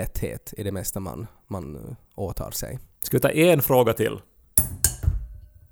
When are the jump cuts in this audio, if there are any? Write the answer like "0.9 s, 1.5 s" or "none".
none